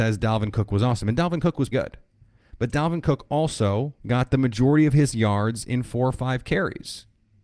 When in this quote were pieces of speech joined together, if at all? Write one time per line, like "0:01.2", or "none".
0:01.7
0:04.0

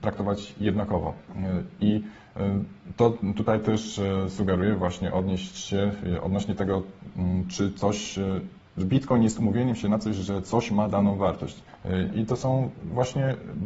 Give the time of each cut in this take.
0:12.1

